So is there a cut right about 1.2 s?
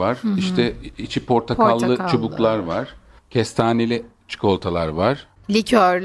no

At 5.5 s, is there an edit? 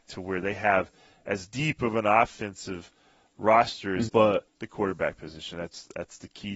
no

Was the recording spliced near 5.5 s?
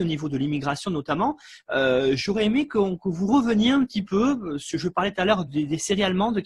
yes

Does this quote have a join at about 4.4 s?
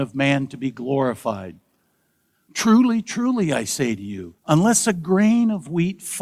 yes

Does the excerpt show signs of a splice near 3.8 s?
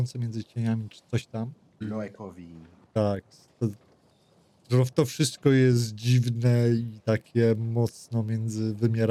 no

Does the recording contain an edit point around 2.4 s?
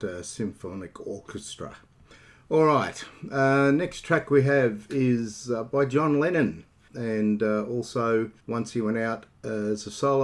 no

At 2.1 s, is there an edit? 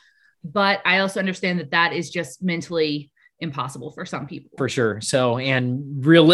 no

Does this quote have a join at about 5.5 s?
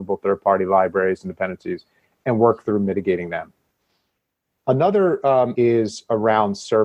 yes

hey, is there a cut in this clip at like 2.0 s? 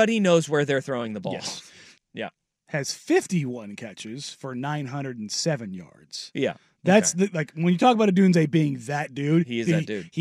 yes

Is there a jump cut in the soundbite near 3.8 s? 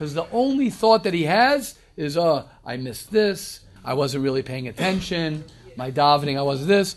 yes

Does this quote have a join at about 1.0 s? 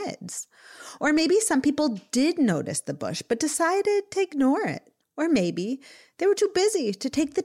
no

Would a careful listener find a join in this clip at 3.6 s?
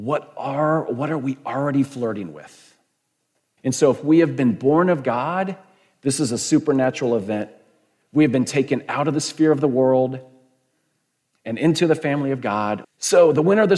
yes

